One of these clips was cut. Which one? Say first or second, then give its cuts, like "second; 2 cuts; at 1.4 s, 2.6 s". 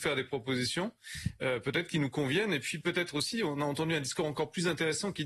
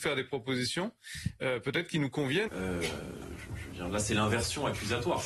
second; 1 cut; at 2.5 s